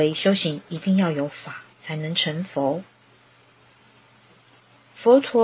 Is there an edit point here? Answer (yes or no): no